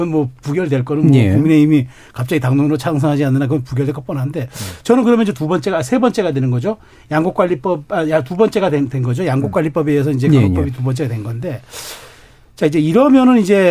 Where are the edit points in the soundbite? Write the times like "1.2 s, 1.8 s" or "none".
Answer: none